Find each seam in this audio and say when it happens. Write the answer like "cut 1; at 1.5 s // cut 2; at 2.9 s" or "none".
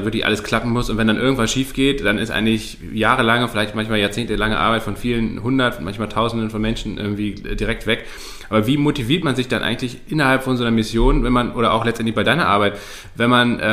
none